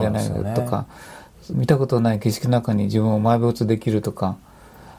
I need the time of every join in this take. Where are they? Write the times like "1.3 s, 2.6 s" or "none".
1.5 s

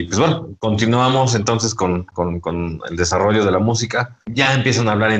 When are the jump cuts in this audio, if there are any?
4.2 s

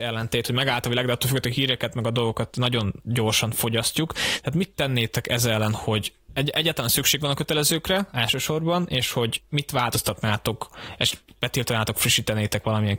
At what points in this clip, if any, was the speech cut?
none

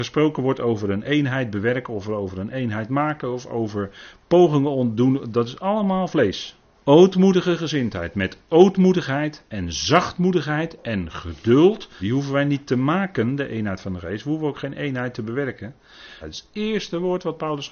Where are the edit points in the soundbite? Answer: 6.7 s, 12.0 s, 16.2 s

